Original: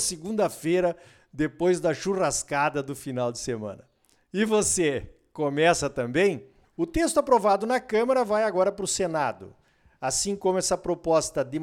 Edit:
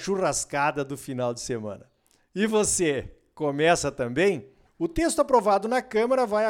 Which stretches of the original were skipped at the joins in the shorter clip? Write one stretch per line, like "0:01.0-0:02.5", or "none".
none